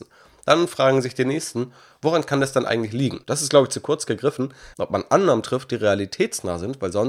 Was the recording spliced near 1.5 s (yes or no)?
no